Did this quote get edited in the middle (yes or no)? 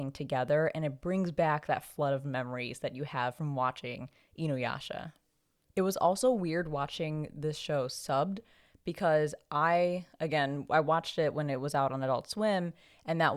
no